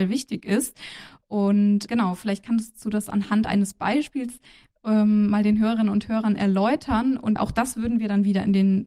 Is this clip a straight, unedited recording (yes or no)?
yes